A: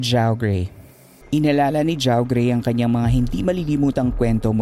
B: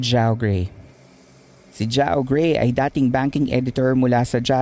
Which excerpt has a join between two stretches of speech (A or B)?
A